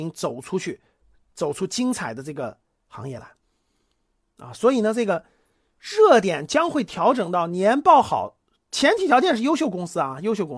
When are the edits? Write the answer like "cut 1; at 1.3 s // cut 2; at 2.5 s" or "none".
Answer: none